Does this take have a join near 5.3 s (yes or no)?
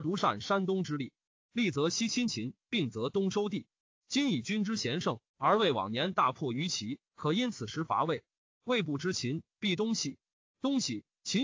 yes